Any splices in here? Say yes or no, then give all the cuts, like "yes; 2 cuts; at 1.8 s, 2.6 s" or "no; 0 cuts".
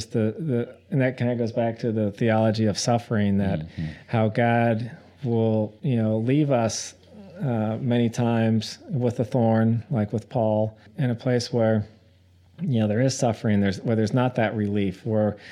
no; 0 cuts